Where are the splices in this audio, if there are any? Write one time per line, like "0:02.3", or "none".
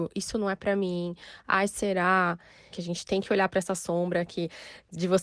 0:02.7

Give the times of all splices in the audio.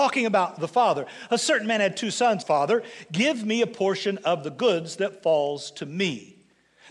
0:02.4

